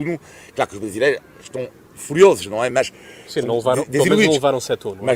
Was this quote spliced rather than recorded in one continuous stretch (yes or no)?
no